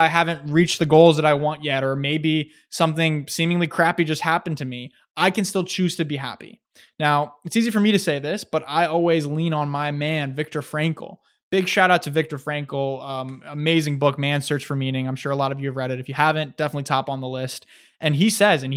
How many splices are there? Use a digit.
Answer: 0